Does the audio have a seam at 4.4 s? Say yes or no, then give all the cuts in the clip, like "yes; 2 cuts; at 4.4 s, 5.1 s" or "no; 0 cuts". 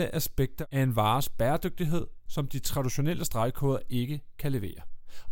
no; 1 cut; at 2.3 s